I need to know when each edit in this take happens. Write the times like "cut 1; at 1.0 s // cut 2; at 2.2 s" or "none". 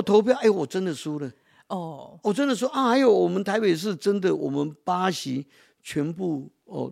none